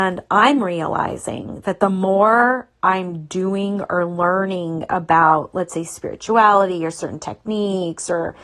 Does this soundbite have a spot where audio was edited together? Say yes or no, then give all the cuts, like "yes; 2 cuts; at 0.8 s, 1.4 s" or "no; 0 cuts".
no; 0 cuts